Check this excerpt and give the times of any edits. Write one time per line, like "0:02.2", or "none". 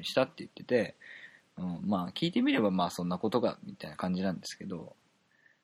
none